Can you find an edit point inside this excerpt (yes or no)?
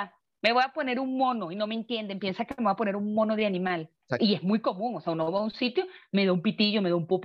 yes